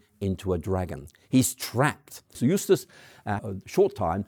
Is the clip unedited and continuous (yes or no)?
no